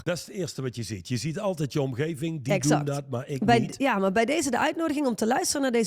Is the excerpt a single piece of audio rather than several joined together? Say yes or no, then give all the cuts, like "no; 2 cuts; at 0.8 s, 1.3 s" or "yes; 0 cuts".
yes; 0 cuts